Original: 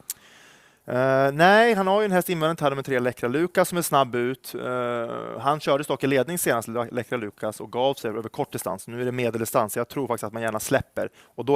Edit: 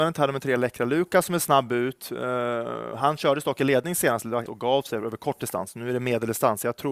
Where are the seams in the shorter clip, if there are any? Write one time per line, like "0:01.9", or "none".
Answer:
0:04.5